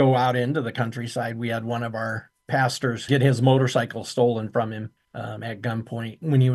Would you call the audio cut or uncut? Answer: uncut